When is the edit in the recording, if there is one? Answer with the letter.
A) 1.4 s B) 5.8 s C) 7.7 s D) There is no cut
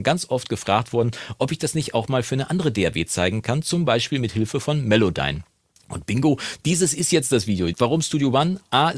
C